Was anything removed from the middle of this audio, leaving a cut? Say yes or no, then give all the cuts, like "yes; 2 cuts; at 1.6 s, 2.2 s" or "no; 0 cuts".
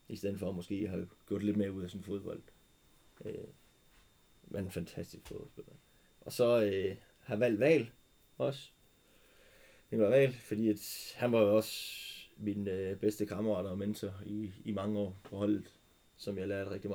no; 0 cuts